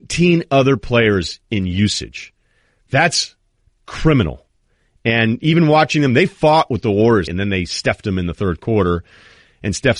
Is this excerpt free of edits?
no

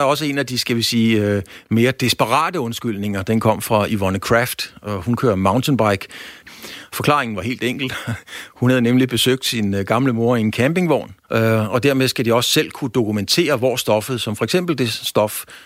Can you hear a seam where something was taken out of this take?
yes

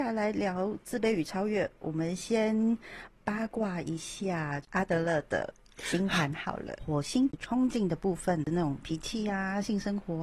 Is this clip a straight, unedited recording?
no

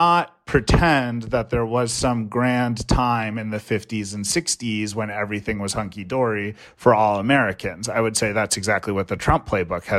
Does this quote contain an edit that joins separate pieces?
no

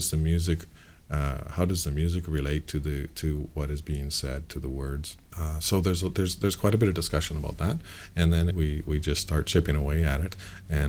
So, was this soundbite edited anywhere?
yes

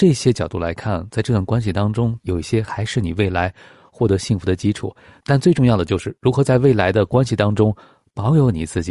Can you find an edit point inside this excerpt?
yes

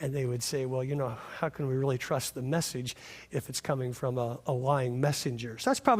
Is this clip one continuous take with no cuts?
yes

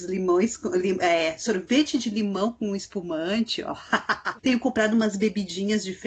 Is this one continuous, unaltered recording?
no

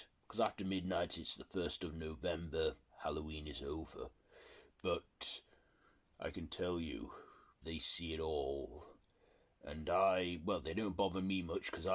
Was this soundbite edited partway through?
yes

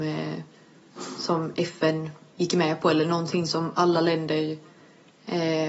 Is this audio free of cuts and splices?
yes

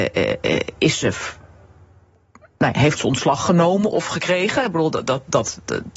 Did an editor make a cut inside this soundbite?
no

